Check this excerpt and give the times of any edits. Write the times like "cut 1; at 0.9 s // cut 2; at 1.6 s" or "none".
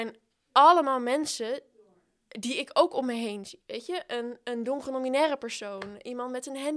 none